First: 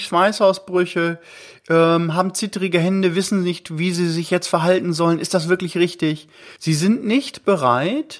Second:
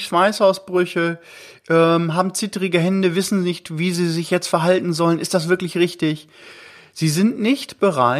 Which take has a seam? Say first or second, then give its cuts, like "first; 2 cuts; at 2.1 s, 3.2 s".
first; 1 cut; at 6.6 s